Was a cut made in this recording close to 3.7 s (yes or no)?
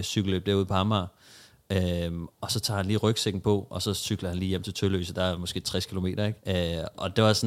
no